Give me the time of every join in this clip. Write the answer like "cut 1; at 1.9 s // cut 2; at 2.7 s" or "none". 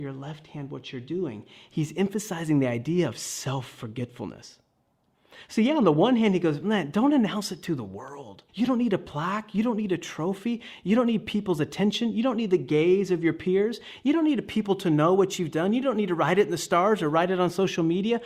cut 1; at 8.5 s